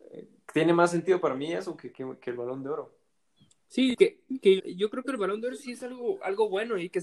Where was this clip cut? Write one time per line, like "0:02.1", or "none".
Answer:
0:04.6